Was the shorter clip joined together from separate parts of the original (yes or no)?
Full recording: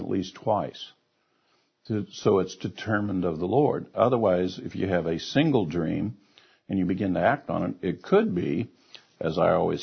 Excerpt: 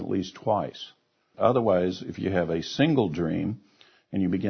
yes